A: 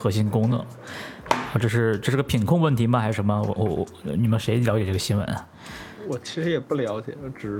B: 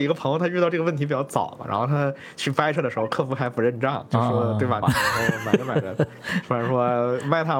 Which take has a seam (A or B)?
B